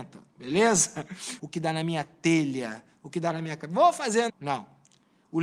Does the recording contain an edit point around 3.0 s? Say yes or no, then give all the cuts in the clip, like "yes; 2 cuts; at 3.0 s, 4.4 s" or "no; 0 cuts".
no; 2 cuts; at 1.4 s, 4.3 s